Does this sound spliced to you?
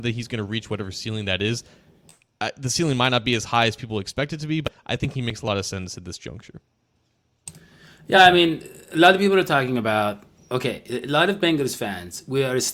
no; 0 cuts

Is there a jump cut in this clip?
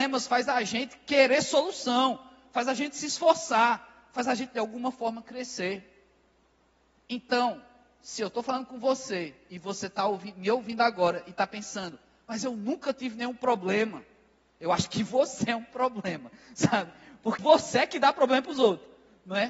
yes; 1 cut; at 17.4 s

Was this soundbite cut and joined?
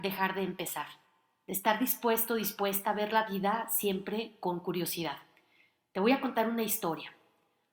no; 0 cuts

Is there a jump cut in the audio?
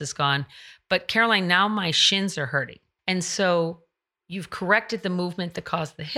yes; 1 cut; at 3.0 s

